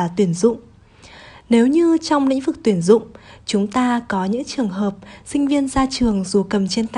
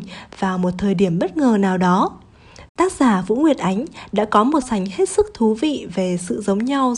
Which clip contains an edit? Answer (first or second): second